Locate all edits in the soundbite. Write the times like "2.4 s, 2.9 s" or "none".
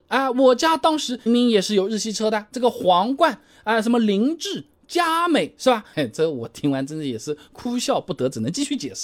1.3 s, 5.9 s